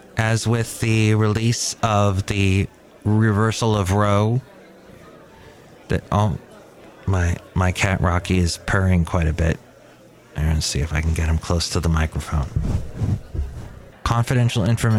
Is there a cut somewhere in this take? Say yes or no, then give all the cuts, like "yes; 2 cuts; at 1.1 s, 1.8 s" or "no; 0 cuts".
yes; 1 cut; at 13.9 s